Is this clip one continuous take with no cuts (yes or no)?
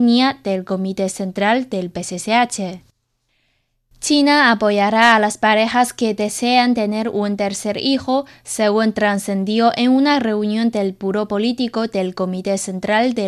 yes